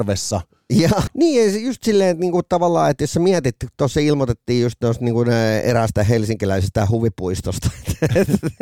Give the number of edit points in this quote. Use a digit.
1